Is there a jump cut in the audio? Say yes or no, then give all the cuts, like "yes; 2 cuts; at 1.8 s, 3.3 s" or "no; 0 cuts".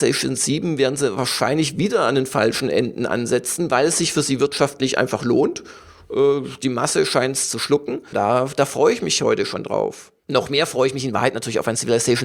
yes; 1 cut; at 8.1 s